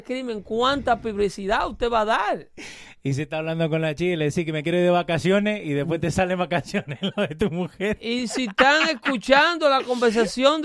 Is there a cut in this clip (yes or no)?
no